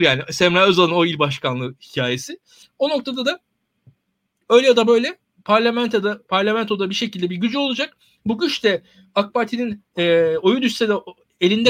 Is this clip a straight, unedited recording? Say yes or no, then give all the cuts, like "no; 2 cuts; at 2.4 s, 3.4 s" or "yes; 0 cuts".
no; 1 cut; at 2.6 s